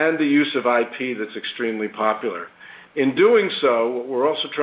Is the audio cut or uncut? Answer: uncut